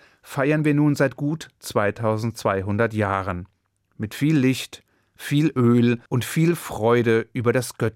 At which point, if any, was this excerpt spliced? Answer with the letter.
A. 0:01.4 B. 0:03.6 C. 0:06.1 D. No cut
C